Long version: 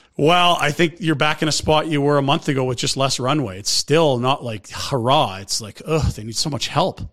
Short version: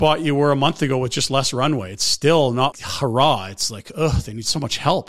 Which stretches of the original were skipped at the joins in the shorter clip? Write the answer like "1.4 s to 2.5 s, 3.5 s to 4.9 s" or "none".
4.4 s to 4.6 s